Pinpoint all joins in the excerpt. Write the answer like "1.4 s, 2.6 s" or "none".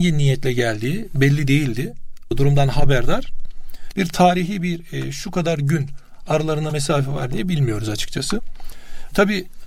2.3 s, 3.9 s